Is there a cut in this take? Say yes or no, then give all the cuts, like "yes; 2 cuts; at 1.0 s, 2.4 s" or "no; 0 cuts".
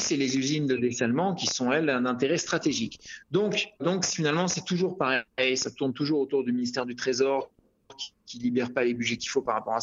yes; 1 cut; at 3.8 s